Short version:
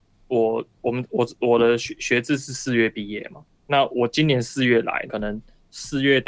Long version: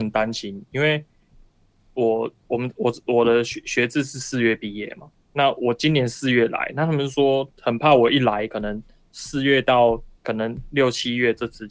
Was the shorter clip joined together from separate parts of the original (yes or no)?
yes